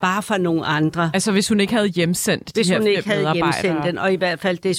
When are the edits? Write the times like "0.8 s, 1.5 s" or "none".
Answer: none